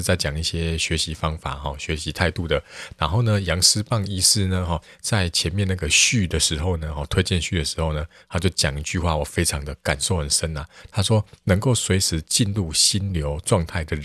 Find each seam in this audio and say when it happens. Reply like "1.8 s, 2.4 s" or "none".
none